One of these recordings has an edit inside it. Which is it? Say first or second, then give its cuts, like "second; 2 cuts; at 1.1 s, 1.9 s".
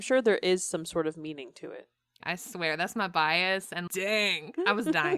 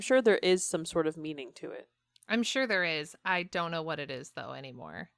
first; 2 cuts; at 2.2 s, 3.9 s